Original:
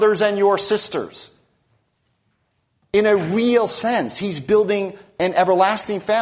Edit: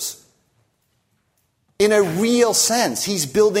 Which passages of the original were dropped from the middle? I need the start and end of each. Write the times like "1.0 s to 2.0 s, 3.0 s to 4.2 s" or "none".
none